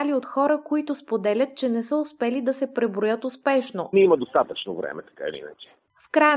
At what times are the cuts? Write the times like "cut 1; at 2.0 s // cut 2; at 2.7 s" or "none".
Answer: cut 1; at 3.9 s